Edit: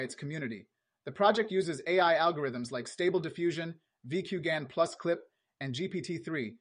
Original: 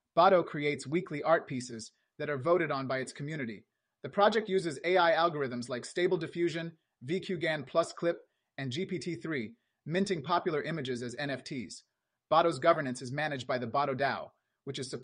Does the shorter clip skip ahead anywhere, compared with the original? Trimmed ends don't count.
no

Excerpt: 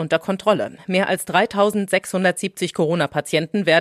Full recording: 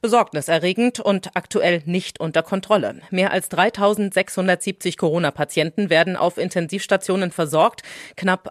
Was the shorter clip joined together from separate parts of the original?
no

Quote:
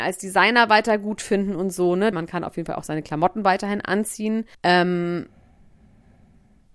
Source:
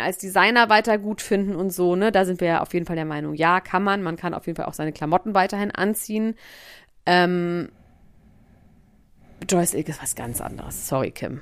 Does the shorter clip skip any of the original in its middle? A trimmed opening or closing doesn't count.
yes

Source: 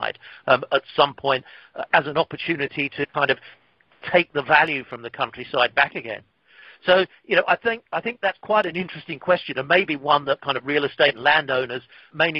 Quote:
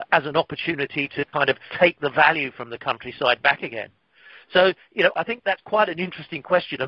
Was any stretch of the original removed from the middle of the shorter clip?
yes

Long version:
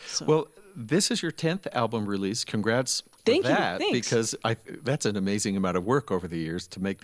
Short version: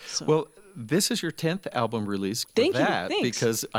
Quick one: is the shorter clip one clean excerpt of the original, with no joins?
no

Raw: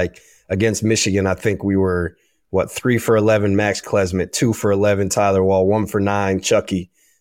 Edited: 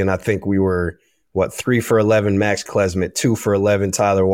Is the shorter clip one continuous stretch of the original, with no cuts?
yes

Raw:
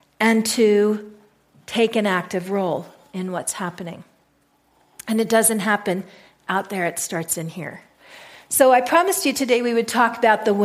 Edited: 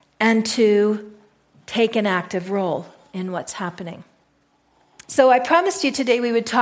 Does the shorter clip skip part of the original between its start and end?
yes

